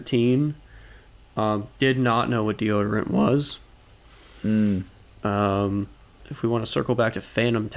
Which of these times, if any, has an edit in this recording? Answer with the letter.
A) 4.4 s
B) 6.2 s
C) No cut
B